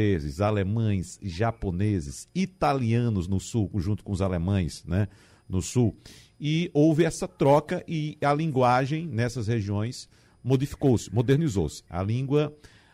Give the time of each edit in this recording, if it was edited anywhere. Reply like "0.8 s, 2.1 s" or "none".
11.9 s

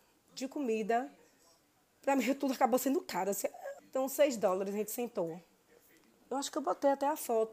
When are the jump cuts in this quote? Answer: 3.8 s, 6.2 s

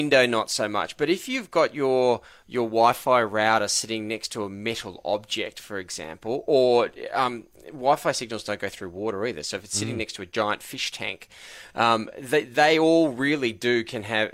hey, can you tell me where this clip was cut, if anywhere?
none

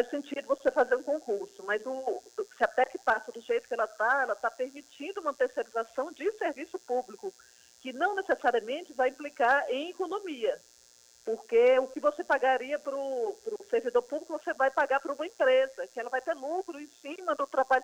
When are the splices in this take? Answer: none

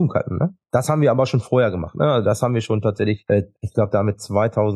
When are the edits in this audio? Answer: none

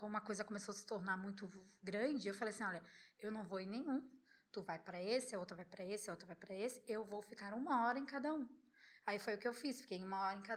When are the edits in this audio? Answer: none

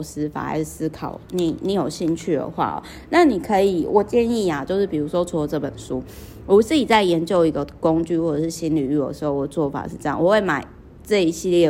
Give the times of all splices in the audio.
none

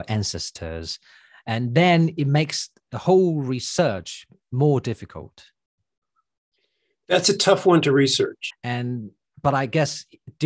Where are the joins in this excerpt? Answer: 8.5 s

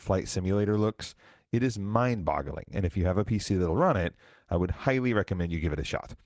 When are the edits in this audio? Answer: none

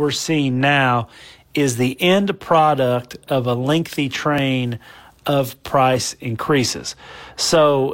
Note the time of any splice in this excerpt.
none

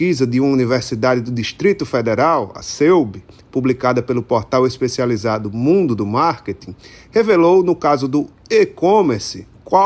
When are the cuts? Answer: none

